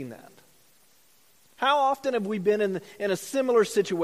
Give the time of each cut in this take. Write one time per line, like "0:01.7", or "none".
none